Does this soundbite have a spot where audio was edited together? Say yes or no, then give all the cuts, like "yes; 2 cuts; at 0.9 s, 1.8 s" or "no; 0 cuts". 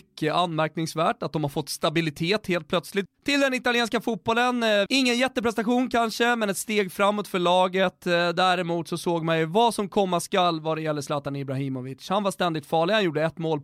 yes; 2 cuts; at 3.1 s, 4.9 s